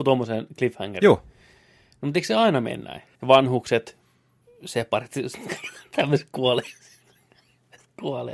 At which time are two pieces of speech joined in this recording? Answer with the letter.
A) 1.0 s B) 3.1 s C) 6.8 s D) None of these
B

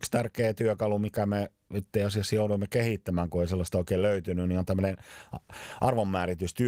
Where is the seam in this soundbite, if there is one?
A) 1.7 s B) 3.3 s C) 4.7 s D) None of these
A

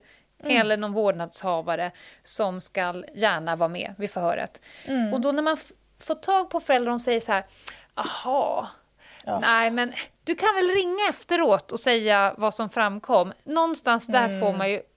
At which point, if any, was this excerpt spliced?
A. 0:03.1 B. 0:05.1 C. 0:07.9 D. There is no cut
A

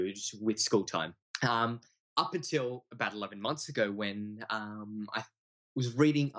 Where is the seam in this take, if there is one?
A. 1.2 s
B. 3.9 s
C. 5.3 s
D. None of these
A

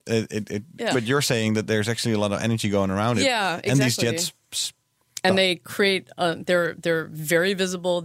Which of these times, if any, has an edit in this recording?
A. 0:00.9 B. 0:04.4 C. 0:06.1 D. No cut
A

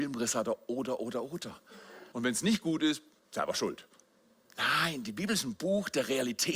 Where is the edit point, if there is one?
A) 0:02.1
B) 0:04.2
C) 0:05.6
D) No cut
A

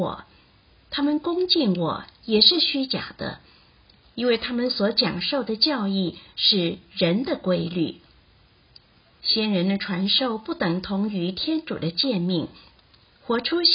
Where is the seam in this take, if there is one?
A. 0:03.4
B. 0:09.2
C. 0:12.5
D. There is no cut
B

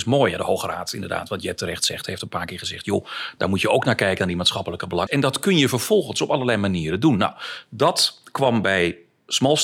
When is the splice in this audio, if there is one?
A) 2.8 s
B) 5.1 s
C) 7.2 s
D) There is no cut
B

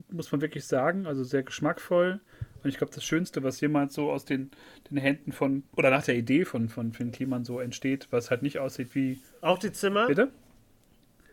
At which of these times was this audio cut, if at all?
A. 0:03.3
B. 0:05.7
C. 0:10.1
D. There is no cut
B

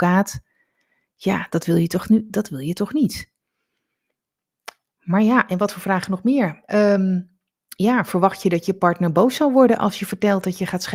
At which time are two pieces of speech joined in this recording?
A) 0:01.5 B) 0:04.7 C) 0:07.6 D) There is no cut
D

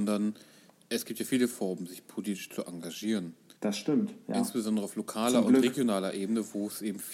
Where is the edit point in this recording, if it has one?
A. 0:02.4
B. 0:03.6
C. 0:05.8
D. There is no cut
B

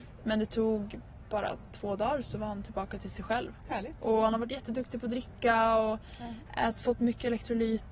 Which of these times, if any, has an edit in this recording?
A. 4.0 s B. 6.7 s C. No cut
C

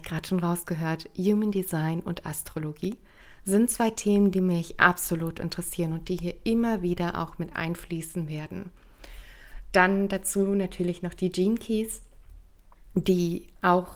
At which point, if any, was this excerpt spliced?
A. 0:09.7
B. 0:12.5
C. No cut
C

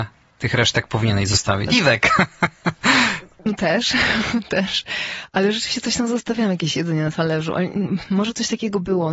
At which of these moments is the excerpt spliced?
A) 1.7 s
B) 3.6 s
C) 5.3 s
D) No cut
A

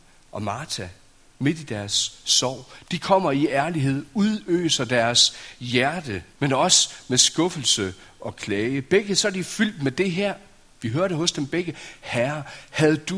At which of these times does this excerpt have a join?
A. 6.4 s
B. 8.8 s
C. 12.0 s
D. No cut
A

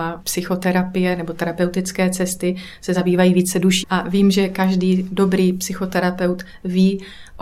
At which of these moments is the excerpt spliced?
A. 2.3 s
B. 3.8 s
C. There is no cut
B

